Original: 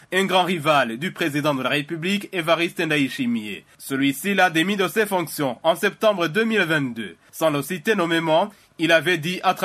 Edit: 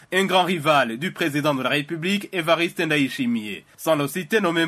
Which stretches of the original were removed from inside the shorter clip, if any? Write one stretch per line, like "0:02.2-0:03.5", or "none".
0:03.7-0:07.2